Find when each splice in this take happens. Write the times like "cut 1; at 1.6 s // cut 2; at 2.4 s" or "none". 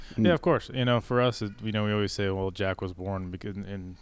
none

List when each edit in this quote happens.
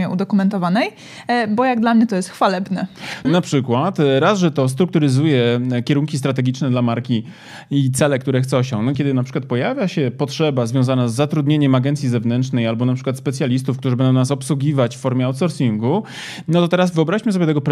cut 1; at 3.2 s // cut 2; at 8.9 s

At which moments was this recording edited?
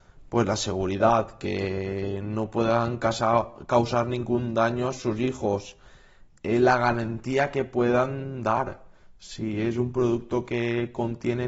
none

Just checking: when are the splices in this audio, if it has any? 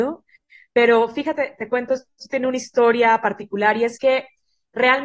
none

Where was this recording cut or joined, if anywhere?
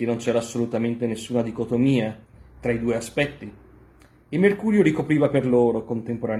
none

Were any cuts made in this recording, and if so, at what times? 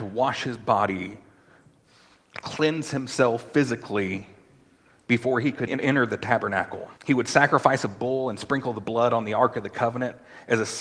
cut 1; at 5.7 s // cut 2; at 7.0 s

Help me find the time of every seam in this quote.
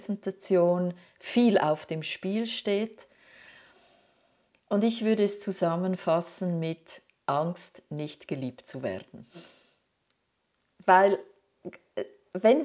none

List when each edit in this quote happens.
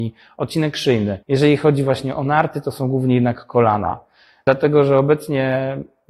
cut 1; at 1.2 s

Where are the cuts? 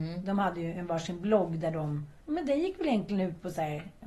cut 1; at 2.2 s

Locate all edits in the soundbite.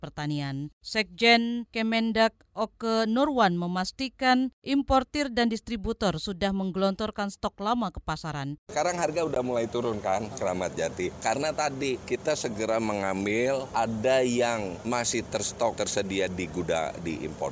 cut 1; at 8.7 s

